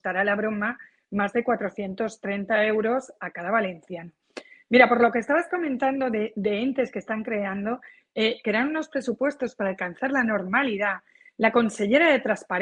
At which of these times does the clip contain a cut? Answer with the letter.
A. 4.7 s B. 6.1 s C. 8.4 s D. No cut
C